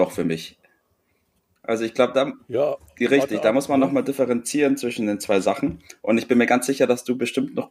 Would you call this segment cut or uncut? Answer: uncut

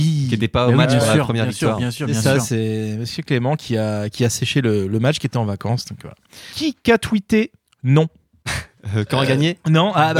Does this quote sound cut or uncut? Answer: uncut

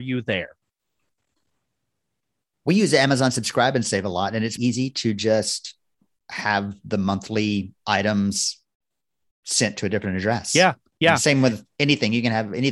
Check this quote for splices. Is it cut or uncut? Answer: cut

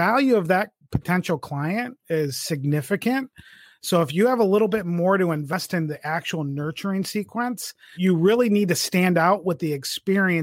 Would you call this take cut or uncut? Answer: cut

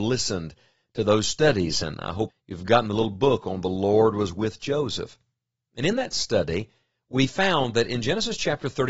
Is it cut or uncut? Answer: cut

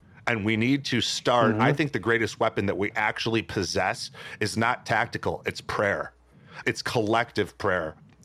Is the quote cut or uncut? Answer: cut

